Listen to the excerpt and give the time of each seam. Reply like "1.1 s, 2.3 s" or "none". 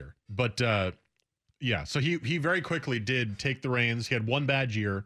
none